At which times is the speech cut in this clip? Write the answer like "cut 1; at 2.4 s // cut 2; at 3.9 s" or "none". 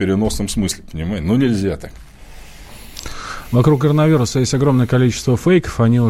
none

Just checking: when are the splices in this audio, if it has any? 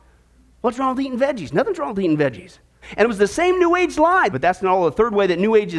cut 1; at 2.8 s // cut 2; at 4.3 s

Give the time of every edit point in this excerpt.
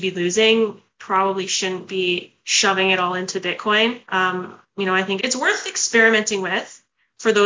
cut 1; at 4.0 s // cut 2; at 5.2 s

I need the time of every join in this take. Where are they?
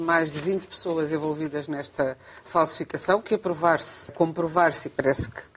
cut 1; at 4.1 s

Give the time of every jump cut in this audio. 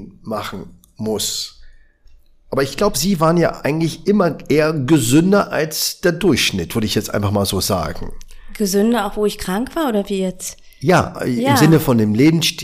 none

